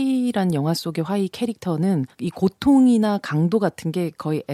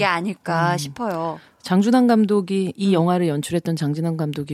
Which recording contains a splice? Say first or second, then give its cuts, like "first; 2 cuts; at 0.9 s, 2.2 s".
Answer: first; 1 cut; at 2.1 s